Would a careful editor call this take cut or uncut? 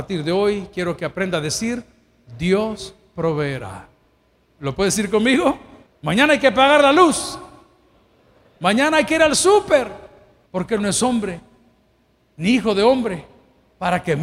cut